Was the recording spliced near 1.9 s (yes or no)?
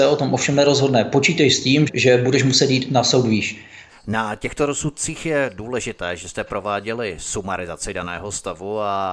yes